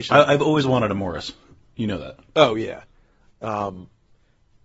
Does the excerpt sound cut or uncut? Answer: cut